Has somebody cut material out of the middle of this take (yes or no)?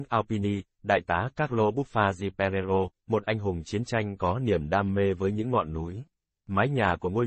yes